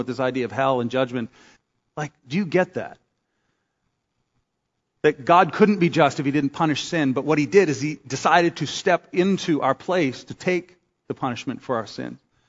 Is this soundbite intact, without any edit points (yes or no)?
no